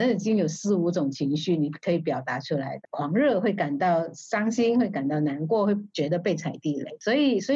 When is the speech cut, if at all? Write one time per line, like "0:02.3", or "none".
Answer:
0:02.8